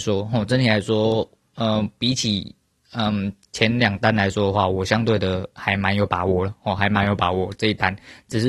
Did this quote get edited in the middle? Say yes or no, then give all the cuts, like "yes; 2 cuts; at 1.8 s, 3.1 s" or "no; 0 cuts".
no; 0 cuts